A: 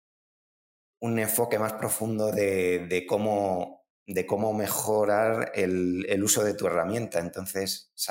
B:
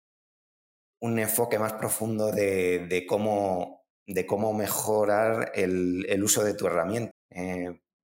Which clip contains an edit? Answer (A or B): B